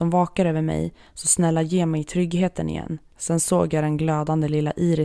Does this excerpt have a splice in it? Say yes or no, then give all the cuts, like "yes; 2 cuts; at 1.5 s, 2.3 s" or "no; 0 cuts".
yes; 1 cut; at 3.1 s